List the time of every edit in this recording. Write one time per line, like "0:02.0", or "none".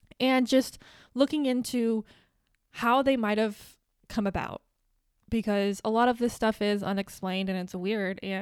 none